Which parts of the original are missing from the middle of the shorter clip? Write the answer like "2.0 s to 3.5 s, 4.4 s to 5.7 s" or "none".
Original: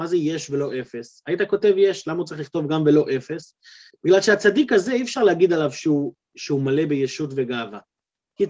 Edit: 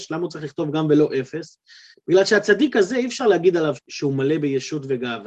5.7 s to 6.2 s